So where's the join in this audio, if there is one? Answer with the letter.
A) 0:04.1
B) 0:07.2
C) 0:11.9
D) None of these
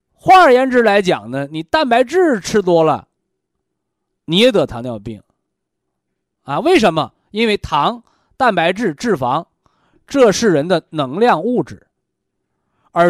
D